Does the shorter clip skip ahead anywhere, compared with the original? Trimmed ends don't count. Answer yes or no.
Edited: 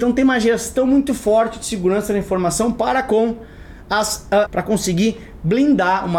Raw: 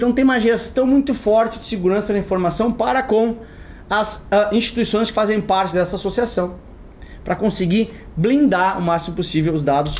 yes